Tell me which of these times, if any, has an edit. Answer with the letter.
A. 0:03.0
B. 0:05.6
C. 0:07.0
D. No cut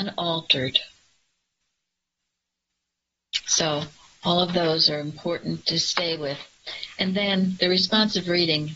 B